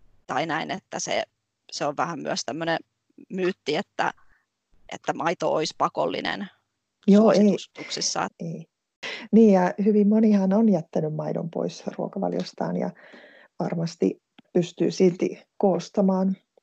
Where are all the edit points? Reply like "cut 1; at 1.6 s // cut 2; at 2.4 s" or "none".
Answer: cut 1; at 8.3 s